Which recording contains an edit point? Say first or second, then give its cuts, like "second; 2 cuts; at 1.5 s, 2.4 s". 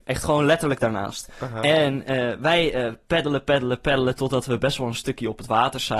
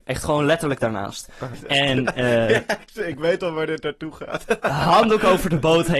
second; 1 cut; at 1.5 s